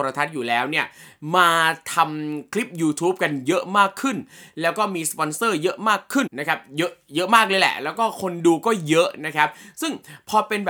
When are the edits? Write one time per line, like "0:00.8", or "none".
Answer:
0:06.3

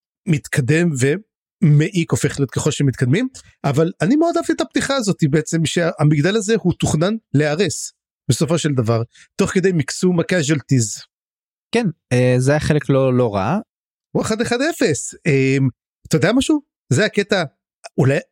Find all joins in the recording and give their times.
0:14.0

